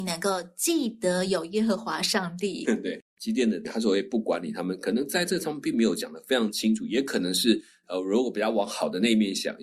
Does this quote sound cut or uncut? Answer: cut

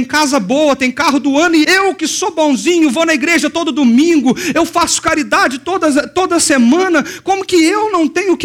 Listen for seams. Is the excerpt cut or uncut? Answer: cut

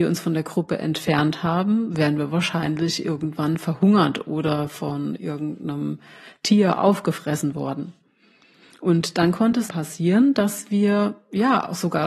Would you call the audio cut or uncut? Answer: cut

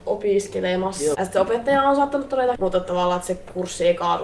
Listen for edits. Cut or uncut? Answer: cut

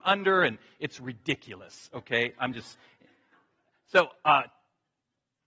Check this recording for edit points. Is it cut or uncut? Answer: uncut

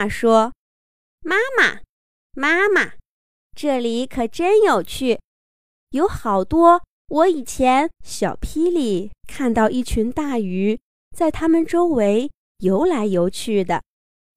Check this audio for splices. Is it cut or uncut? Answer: cut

